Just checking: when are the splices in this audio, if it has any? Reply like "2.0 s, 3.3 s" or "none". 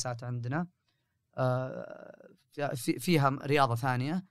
none